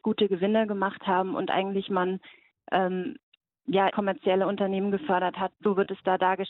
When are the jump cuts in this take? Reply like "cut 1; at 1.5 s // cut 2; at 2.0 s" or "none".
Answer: cut 1; at 3.9 s // cut 2; at 5.5 s